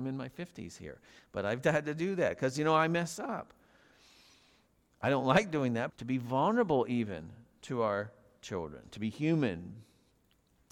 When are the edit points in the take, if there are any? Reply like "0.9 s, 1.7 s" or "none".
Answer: 5.9 s